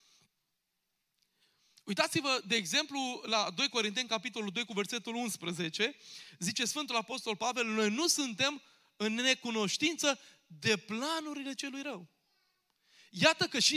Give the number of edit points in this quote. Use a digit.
0